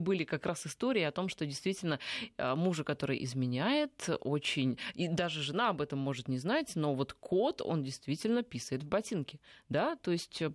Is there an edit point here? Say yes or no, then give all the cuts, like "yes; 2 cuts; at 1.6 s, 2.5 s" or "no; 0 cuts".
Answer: no; 0 cuts